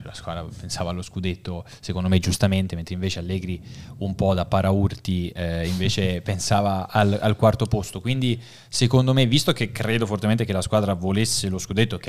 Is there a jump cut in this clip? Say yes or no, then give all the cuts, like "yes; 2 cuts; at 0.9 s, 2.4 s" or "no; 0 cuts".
no; 0 cuts